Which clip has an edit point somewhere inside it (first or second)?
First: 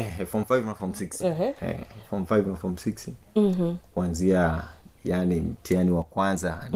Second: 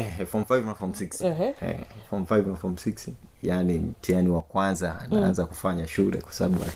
second